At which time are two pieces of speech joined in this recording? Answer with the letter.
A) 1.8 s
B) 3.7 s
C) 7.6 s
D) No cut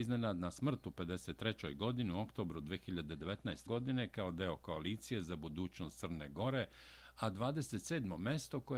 B